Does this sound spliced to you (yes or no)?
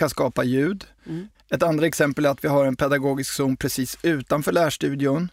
yes